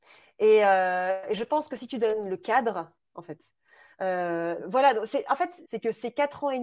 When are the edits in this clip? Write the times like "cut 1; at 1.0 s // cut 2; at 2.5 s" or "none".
cut 1; at 3.1 s // cut 2; at 4.6 s // cut 3; at 5.6 s